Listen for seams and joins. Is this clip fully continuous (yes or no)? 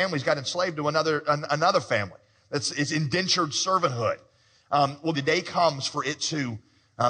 no